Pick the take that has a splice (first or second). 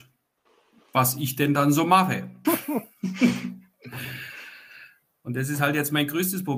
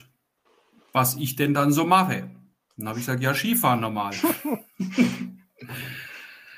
first